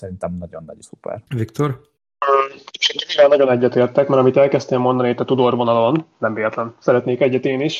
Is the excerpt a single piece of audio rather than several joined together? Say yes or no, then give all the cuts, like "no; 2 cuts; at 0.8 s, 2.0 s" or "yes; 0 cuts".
no; 1 cut; at 1.3 s